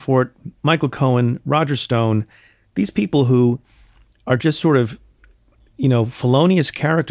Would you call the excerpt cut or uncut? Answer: uncut